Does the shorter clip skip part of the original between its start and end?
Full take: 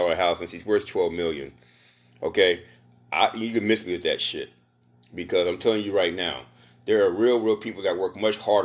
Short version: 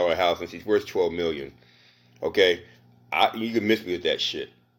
no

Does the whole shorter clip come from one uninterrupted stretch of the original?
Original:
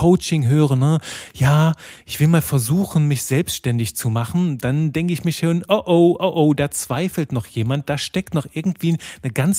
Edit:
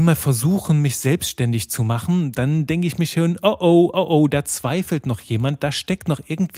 yes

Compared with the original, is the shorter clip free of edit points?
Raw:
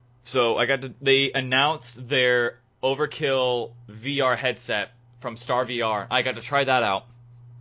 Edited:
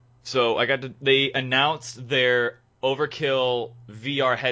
yes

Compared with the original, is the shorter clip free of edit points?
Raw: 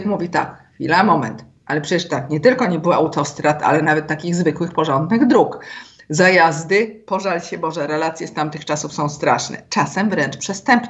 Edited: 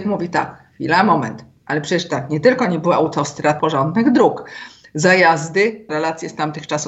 no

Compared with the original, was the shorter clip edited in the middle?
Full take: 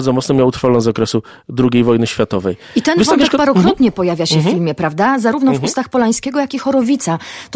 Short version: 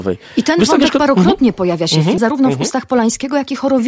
yes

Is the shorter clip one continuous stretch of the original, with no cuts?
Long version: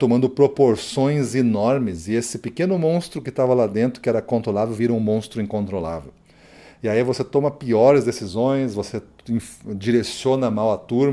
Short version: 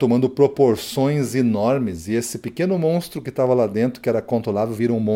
yes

